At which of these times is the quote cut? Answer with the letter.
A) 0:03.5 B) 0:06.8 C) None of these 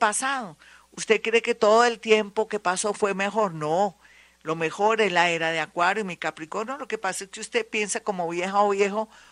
C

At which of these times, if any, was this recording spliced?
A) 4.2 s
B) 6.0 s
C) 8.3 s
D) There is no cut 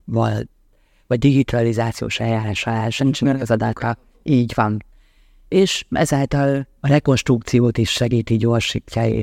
D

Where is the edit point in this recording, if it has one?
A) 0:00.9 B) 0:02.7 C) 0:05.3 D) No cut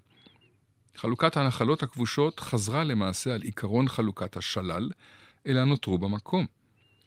C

